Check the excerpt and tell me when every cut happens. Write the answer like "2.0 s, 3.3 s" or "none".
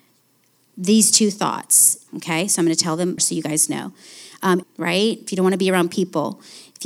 2.1 s, 3.2 s, 4.6 s